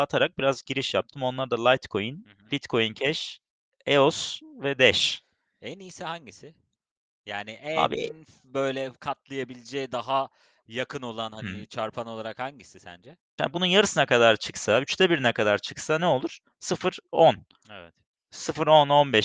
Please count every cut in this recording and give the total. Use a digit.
1